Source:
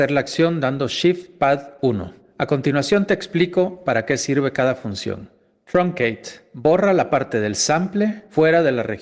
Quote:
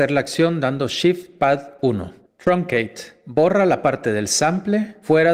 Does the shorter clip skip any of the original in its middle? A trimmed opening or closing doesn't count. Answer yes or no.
yes